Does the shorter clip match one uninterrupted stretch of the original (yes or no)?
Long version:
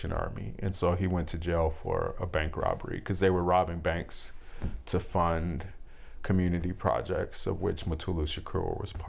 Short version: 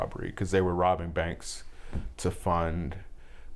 yes